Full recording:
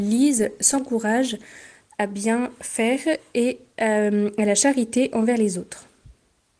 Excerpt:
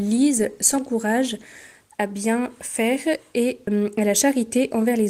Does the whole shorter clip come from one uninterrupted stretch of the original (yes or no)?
no